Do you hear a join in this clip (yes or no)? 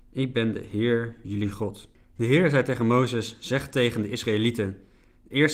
no